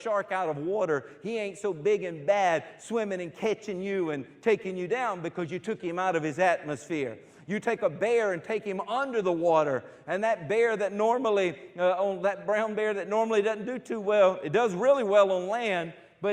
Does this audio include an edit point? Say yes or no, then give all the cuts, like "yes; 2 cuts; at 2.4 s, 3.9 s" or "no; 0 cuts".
no; 0 cuts